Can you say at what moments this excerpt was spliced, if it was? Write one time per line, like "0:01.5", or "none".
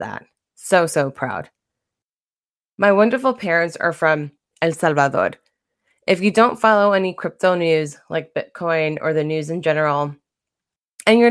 none